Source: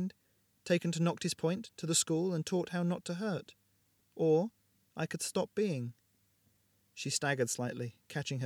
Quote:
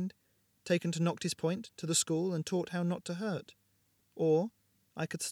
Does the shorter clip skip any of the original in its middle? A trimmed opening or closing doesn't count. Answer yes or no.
no